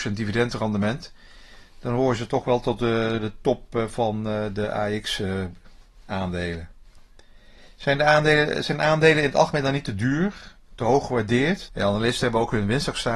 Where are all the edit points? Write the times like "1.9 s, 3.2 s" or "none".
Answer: 11.7 s